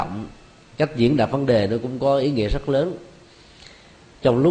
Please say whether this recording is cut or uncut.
uncut